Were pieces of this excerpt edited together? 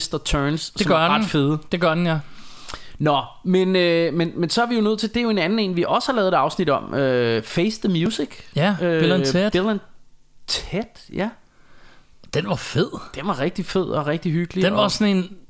no; 0 cuts

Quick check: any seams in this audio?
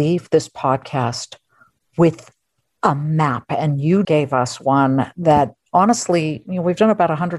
yes; 1 cut; at 4.0 s

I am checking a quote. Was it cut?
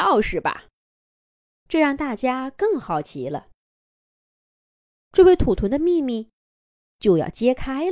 yes; 2 cuts; at 1.6 s, 5.0 s

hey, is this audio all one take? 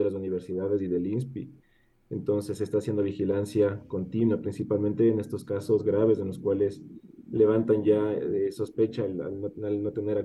yes; 0 cuts

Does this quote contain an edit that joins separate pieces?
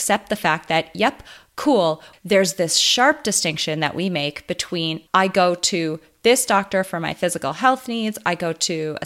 yes; 2 cuts; at 2.1 s, 5.1 s

